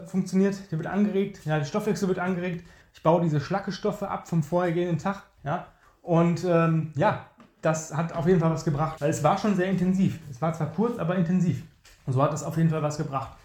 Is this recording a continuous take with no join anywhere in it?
no; 2 cuts; at 5.4 s, 9.0 s

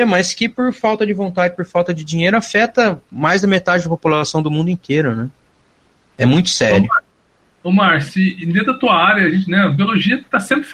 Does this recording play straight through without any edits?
yes; 0 cuts

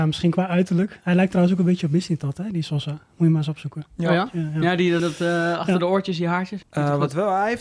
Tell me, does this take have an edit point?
yes; 2 cuts; at 5.0 s, 6.6 s

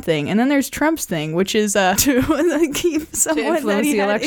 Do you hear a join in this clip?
yes; 1 cut; at 2.0 s

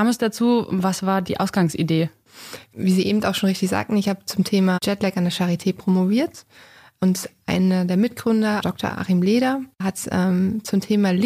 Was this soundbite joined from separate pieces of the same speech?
no; 0 cuts

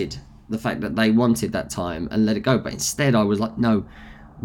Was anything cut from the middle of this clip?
no; 0 cuts

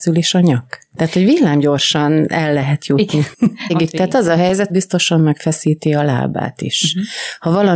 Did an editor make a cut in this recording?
yes; 2 cuts; at 3.7 s, 4.7 s

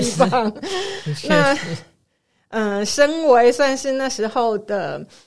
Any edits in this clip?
no; 0 cuts

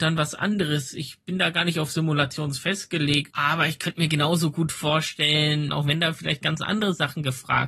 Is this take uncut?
no; 2 cuts; at 3.3 s, 5.7 s

